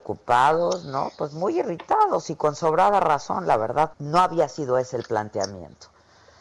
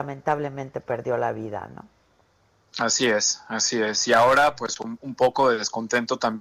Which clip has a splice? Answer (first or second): first